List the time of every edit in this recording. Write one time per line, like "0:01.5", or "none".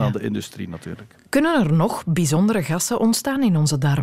none